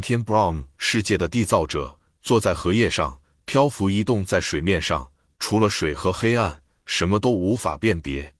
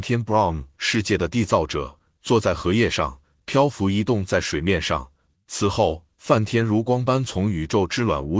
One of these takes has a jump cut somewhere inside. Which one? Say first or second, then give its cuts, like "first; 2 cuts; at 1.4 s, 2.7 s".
second; 1 cut; at 5.3 s